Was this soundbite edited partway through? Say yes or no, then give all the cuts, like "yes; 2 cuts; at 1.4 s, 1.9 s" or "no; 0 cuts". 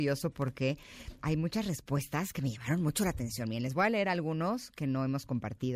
yes; 1 cut; at 1.2 s